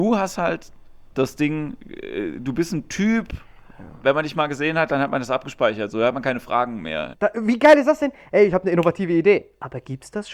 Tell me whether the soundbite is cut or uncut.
cut